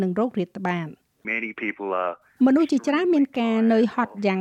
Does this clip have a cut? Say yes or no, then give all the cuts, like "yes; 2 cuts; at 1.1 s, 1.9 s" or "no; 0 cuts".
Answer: yes; 1 cut; at 1.2 s